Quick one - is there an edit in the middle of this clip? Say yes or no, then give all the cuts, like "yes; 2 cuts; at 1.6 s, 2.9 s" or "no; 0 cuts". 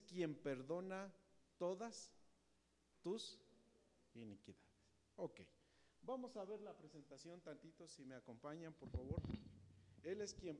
no; 0 cuts